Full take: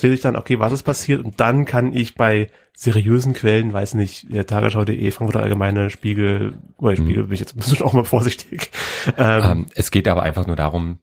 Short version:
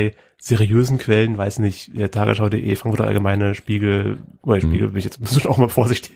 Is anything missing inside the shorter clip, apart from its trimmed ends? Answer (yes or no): no